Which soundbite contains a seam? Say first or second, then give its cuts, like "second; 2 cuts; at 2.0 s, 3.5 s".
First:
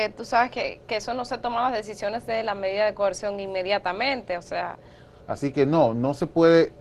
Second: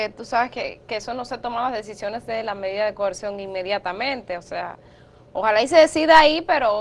first; 1 cut; at 5.2 s